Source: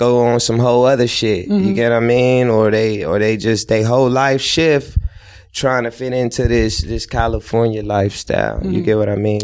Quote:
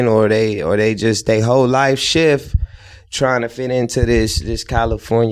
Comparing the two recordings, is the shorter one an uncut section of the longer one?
yes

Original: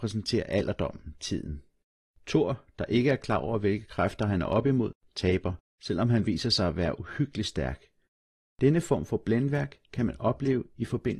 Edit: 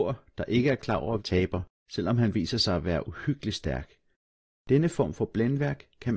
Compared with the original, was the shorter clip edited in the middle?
yes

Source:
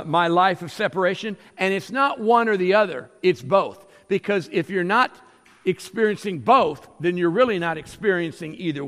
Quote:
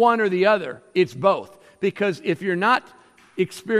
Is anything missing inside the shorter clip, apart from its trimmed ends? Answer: no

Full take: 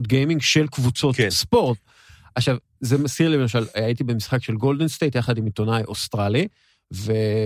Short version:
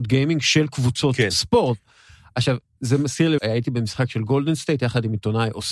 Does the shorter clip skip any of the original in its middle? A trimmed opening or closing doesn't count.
yes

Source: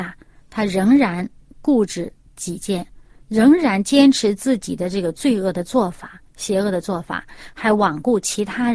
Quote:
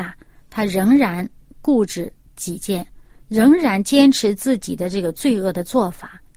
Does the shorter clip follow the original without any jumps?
yes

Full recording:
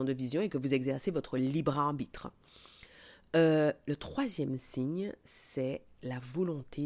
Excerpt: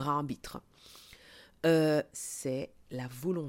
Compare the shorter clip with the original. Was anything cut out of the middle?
yes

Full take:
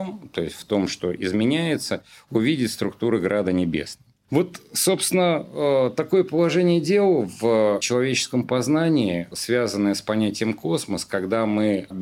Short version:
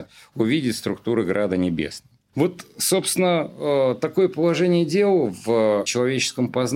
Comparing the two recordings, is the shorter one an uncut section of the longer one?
yes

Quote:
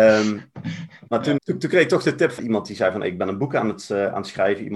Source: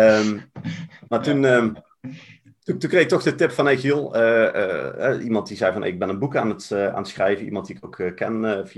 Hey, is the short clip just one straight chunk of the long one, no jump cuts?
no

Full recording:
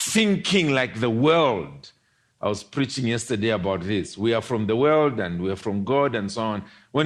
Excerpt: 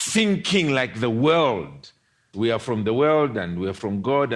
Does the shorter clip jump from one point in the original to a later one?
yes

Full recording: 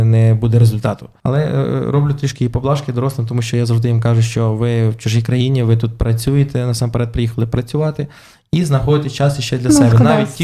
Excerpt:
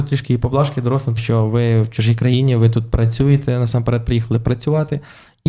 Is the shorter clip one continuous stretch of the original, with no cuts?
no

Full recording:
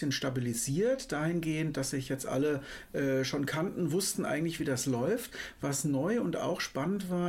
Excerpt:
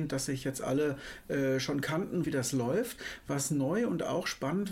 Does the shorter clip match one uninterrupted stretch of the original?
no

